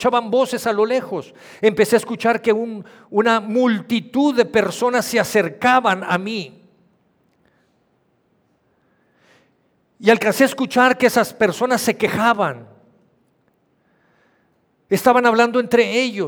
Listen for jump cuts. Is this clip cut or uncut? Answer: uncut